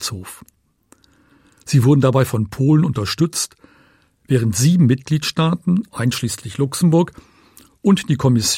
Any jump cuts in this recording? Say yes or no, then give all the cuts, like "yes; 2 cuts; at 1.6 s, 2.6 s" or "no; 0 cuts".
no; 0 cuts